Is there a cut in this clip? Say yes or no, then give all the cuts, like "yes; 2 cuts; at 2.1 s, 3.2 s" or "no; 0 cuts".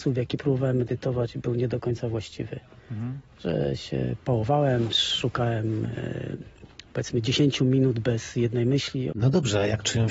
yes; 1 cut; at 9.1 s